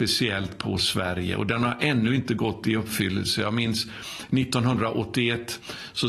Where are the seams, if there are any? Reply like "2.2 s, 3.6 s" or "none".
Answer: none